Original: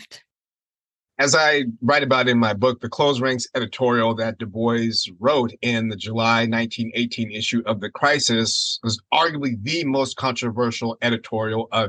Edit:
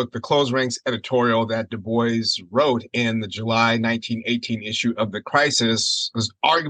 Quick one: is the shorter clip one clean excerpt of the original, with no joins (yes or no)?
yes